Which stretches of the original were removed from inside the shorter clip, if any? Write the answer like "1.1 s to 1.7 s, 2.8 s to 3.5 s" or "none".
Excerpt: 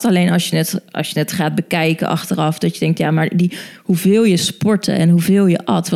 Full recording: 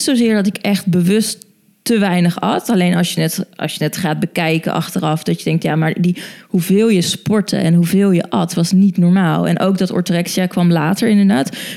none